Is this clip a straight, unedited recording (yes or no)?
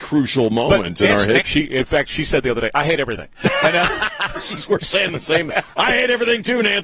no